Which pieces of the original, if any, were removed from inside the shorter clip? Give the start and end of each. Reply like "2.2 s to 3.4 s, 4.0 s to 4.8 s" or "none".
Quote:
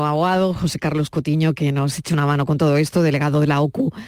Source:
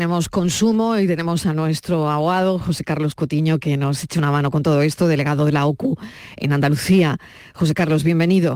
none

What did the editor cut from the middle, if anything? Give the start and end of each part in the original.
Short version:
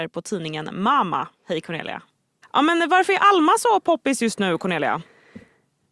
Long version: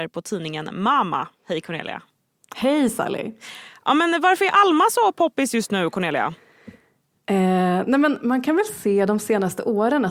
2.4 s to 3.7 s

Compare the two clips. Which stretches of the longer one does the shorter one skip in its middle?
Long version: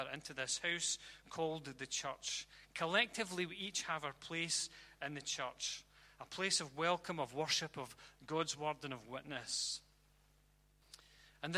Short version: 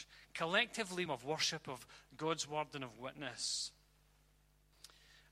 3.5 s to 7.2 s

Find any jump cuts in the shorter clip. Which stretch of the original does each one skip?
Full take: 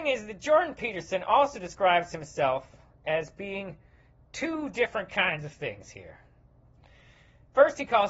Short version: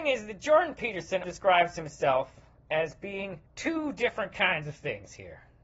1.2 s to 1.6 s, 3.8 s to 4.2 s

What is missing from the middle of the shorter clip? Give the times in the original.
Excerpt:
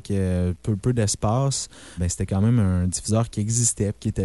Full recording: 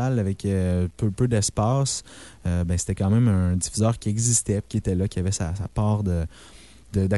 2.3 s to 2.7 s

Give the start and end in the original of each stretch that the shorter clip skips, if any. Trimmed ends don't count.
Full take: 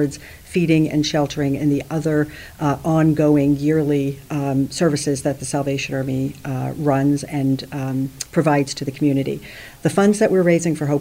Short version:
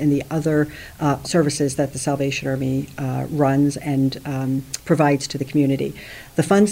2.8 s to 4.7 s

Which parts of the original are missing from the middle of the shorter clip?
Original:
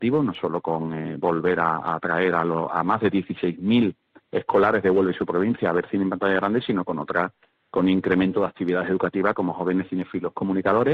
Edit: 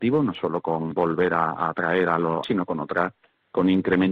0.9 s to 1.2 s, 2.7 s to 6.6 s

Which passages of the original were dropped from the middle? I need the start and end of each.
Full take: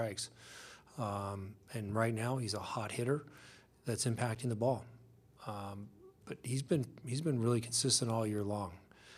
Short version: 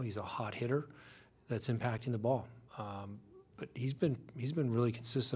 5.0 s to 5.4 s

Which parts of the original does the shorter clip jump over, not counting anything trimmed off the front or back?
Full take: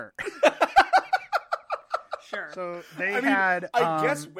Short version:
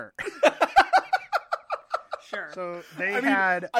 none

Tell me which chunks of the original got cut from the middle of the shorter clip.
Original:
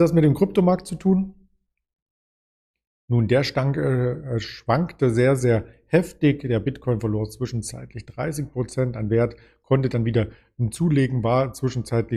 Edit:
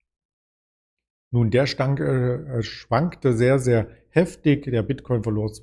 none

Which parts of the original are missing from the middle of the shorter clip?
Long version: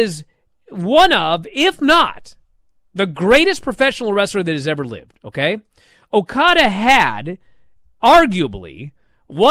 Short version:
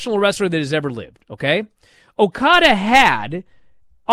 none

